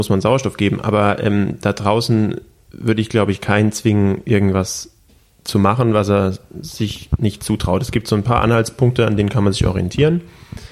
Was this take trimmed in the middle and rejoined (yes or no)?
no